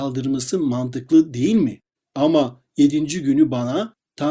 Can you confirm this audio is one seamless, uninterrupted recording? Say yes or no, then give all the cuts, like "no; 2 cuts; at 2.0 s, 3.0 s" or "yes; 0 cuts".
no; 1 cut; at 2.0 s